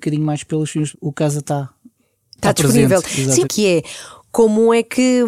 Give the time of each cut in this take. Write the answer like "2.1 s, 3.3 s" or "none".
0.9 s, 3.4 s